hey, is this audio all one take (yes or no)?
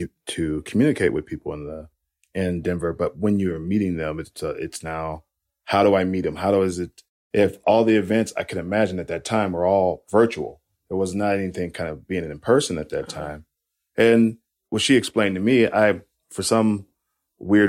yes